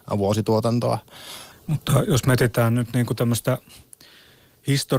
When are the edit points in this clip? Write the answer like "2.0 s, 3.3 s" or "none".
1.5 s